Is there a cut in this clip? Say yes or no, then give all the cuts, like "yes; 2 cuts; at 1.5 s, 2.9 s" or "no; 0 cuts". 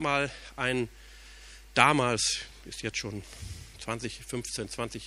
no; 0 cuts